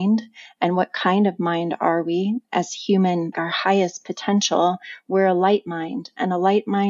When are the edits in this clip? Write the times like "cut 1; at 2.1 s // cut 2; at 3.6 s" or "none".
cut 1; at 3.3 s

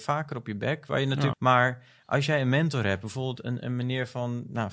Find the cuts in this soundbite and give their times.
cut 1; at 1.3 s

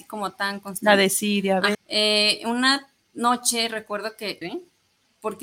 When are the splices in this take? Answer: cut 1; at 1.7 s // cut 2; at 4.4 s

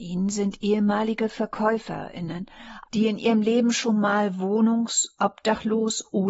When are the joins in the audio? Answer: cut 1; at 2.8 s

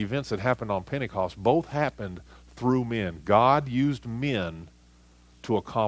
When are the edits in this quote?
none

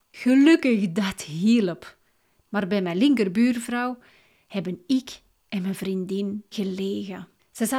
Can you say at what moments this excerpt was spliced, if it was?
cut 1; at 6.5 s

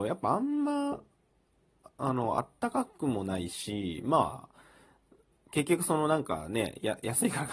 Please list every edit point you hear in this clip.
none

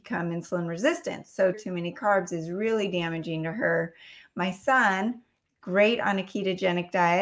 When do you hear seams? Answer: cut 1; at 1.5 s

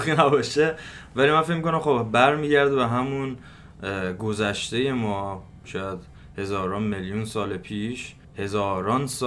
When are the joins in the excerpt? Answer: cut 1; at 8.2 s

